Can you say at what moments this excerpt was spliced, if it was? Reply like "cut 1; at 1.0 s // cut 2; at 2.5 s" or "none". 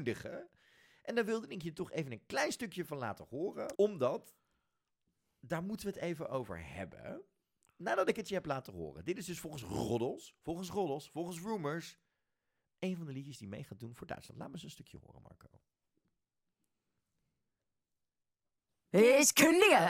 cut 1; at 3.7 s